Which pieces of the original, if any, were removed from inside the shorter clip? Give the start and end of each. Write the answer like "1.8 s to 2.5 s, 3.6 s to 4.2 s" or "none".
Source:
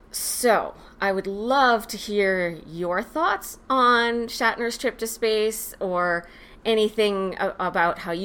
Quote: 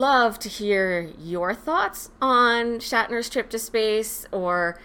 none